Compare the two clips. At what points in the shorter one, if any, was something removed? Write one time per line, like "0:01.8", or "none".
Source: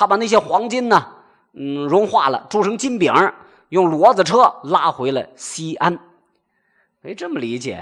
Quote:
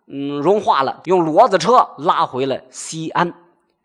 0:01.0